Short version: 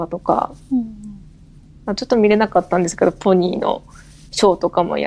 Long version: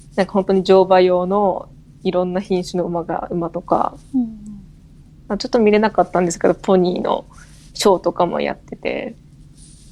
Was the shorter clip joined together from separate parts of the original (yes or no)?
no